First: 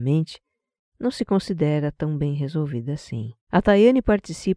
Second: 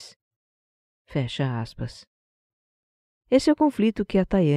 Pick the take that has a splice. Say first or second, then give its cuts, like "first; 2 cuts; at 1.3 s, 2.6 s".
first; 1 cut; at 3.4 s